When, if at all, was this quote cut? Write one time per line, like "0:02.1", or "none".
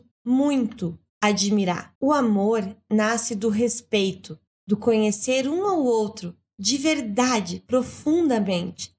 0:02.0

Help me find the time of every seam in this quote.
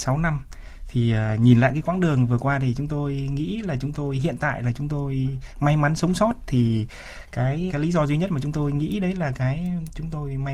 0:07.7

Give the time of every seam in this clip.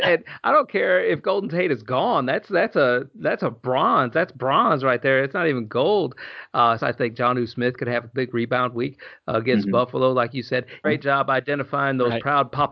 0:06.8
0:10.8

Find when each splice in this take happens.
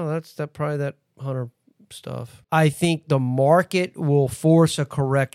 0:02.4

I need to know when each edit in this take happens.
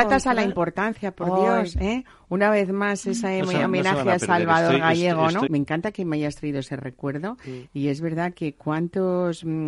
0:05.5
0:07.7

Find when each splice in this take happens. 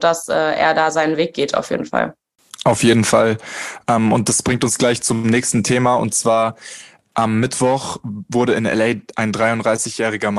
none

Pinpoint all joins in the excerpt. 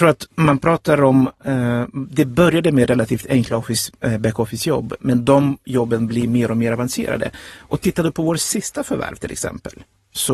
0:05.0

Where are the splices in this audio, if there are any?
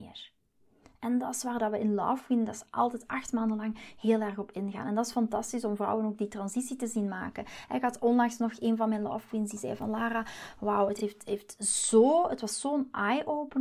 none

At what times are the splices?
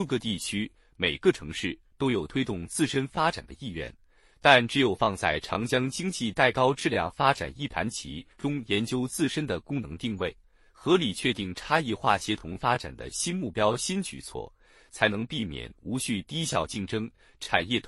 none

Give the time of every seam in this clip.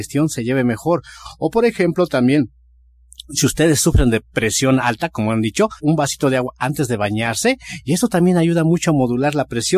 0:05.8

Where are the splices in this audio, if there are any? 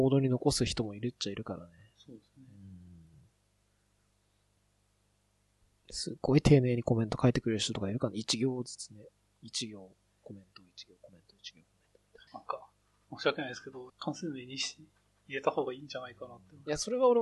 0:12.3
0:13.9

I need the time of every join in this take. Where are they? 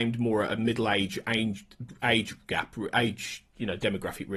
none

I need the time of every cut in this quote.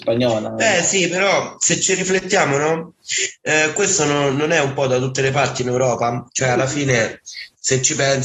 none

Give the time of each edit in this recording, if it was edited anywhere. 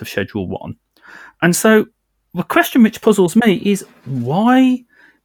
none

